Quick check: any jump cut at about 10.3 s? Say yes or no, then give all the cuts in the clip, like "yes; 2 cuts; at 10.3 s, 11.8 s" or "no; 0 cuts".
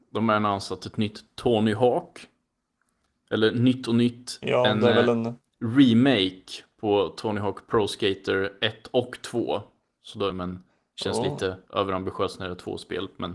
yes; 1 cut; at 10.3 s